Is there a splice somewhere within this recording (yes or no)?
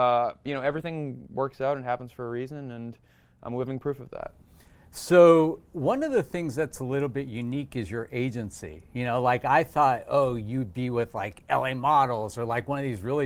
no